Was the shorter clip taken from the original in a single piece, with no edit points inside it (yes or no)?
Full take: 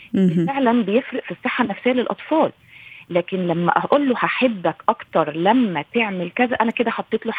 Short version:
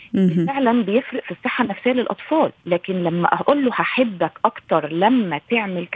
no